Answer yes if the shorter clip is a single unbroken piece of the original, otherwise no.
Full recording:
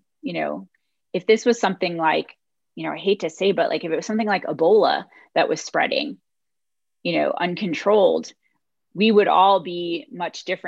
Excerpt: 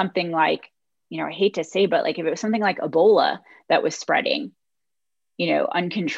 yes